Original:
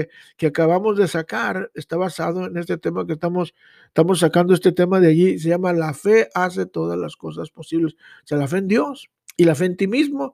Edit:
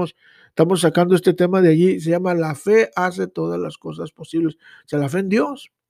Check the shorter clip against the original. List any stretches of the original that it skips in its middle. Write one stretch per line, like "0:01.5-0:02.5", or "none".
none